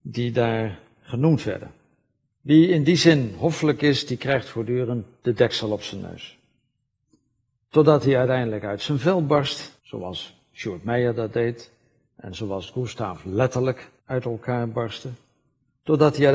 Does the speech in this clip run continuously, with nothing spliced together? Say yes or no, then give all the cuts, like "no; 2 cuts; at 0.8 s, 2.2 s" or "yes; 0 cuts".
no; 3 cuts; at 2.3 s, 9.8 s, 14.0 s